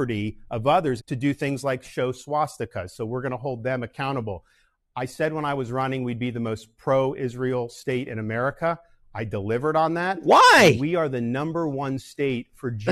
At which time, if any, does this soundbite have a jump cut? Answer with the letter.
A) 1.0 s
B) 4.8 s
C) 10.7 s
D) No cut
A